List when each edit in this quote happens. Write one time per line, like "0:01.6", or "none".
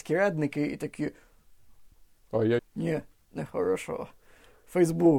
0:02.6